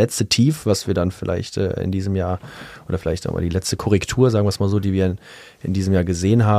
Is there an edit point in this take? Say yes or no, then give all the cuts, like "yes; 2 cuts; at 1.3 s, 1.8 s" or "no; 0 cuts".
no; 0 cuts